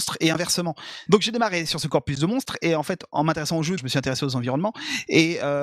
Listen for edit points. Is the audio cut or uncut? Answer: cut